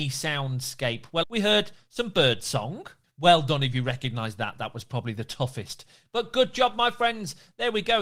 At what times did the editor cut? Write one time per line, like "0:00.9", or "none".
0:01.2
0:03.0